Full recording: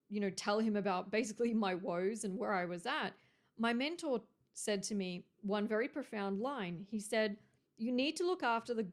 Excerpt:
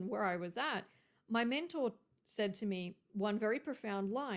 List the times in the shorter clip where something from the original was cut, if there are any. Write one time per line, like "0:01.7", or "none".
none